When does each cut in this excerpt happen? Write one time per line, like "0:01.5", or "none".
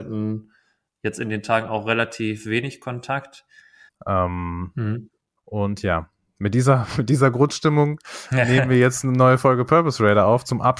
0:03.9
0:05.4